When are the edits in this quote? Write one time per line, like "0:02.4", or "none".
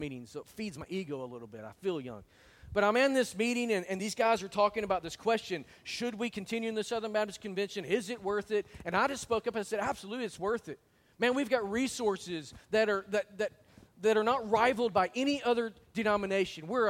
none